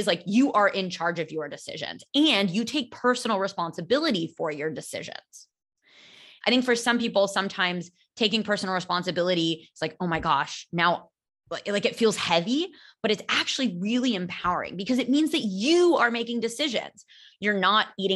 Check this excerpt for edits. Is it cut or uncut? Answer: cut